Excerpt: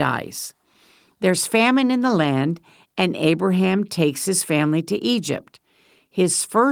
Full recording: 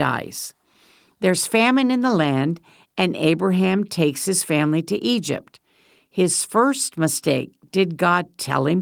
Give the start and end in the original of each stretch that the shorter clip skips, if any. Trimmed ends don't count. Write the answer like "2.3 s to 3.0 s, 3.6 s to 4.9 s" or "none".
none

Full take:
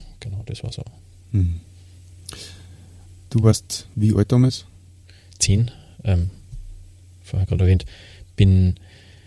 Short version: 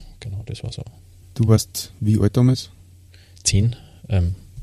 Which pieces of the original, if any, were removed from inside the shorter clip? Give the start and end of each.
1.2 s to 3.2 s

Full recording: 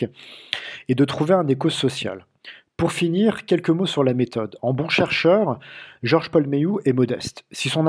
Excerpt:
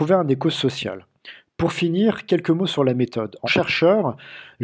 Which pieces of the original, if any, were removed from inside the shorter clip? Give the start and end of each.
4.6 s to 4.9 s

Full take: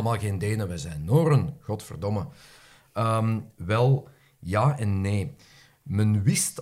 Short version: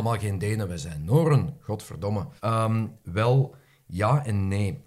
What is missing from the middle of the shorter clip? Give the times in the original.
2.4 s to 2.9 s

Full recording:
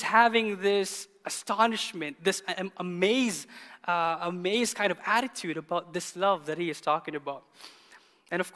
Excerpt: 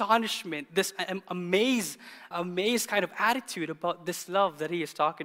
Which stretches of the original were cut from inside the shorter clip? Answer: 3.8 s to 4.2 s

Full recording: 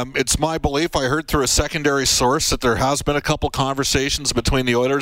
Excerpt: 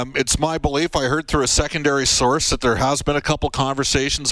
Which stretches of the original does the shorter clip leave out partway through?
none

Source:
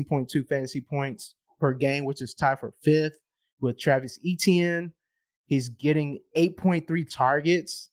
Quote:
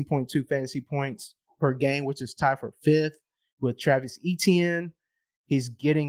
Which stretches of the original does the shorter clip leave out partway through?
none

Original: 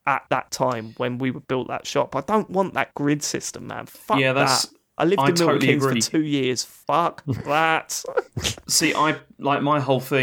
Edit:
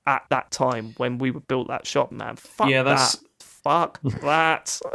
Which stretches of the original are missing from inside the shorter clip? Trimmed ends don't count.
2.1 s to 3.6 s, 4.9 s to 6.6 s

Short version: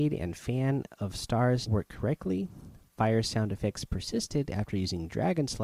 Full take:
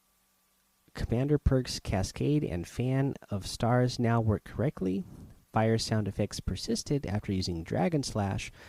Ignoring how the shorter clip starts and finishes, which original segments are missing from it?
4.0 s to 4.2 s

